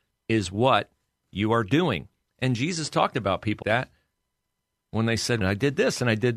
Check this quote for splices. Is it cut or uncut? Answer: cut